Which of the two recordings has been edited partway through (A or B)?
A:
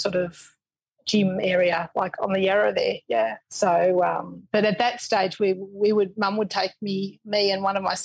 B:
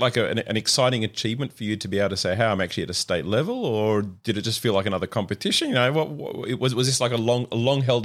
A